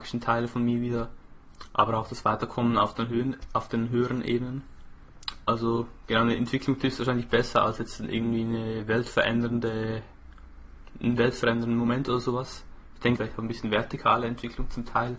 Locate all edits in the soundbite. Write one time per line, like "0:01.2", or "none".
0:05.4
0:13.2